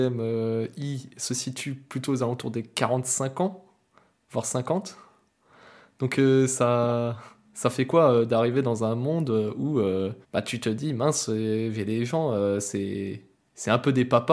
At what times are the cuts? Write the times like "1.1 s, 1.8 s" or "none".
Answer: 10.2 s